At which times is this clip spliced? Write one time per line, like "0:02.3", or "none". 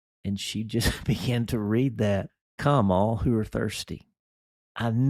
none